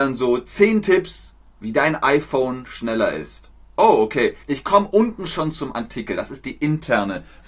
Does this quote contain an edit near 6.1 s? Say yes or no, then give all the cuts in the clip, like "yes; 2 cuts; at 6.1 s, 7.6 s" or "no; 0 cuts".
no; 1 cut; at 4.4 s